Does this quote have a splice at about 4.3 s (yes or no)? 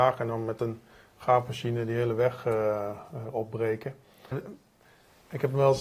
yes